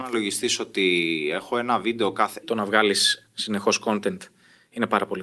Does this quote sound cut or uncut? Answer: cut